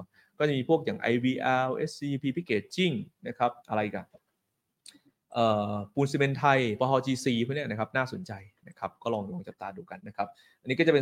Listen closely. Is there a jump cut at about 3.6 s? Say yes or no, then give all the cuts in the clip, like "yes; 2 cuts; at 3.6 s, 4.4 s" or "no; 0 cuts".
yes; 2 cuts; at 3.6 s, 10.0 s